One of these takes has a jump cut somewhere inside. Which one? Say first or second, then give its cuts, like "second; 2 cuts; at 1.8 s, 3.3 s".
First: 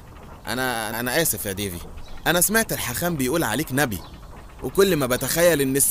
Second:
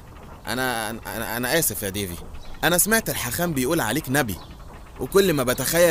first; 1 cut; at 0.9 s